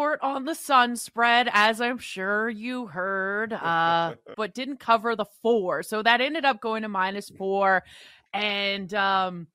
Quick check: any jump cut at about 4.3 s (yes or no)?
yes